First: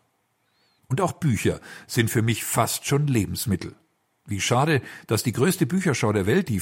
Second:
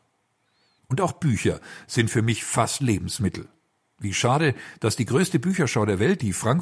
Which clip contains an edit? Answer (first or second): second